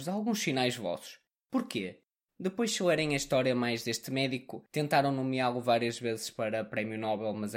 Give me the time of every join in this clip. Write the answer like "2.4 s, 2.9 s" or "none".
2.3 s